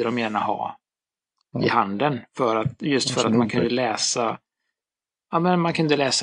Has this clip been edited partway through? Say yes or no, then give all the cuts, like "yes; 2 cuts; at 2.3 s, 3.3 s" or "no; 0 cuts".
no; 0 cuts